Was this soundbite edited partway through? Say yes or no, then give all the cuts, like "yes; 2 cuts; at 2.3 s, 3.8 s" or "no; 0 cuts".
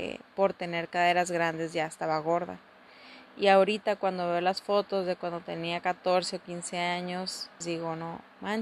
yes; 1 cut; at 7.6 s